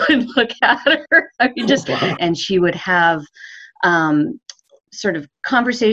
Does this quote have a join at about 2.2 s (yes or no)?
yes